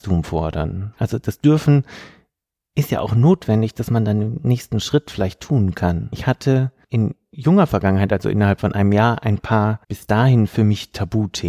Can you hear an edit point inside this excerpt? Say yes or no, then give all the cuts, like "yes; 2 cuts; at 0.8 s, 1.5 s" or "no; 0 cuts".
yes; 3 cuts; at 1.0 s, 6.1 s, 9.8 s